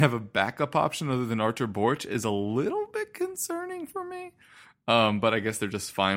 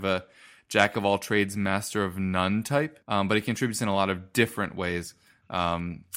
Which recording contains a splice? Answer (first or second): second